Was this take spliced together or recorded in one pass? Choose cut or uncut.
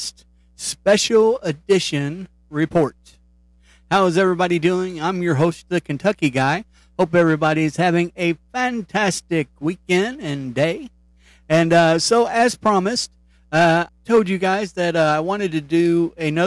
cut